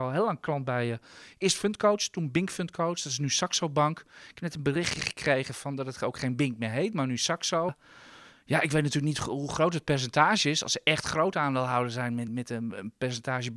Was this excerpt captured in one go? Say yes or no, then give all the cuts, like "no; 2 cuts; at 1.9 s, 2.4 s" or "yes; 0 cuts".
no; 2 cuts; at 7.7 s, 12.3 s